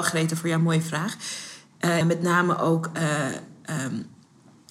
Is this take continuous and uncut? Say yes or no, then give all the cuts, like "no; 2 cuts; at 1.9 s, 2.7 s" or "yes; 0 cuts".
no; 1 cut; at 2.0 s